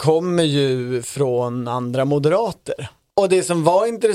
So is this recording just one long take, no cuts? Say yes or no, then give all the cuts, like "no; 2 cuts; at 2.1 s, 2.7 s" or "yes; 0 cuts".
no; 1 cut; at 3.1 s